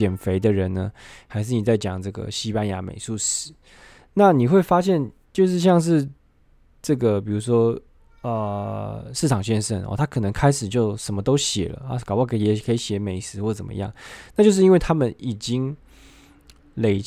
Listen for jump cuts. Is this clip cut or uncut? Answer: uncut